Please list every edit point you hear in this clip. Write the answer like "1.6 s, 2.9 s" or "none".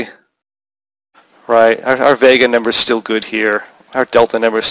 none